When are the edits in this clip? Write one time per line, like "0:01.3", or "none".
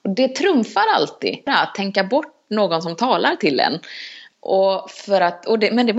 0:01.5